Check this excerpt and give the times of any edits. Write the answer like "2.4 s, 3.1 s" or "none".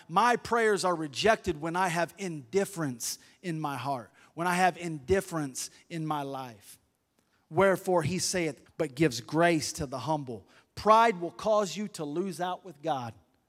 7.3 s, 8.7 s